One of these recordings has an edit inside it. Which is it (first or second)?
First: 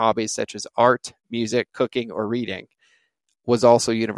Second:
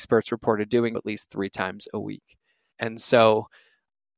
second